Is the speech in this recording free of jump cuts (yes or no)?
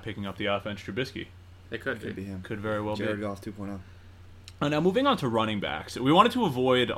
yes